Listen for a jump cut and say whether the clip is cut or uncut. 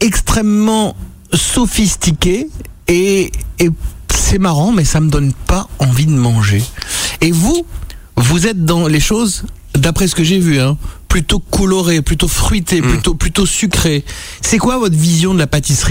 uncut